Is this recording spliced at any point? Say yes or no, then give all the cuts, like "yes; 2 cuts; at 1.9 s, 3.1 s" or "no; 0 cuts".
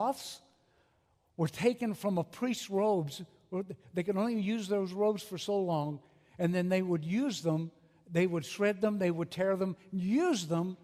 no; 0 cuts